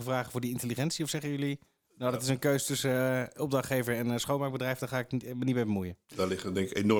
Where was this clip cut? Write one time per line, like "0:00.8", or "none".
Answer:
0:06.0